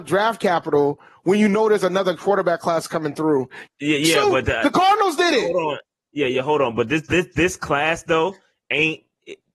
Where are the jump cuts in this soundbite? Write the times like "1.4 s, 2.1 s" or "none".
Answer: 3.7 s